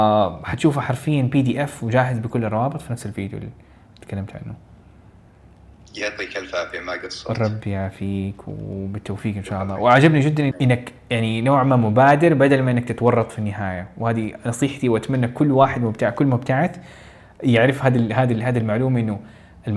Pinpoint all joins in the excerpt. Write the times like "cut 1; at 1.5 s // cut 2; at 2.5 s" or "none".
cut 1; at 10.5 s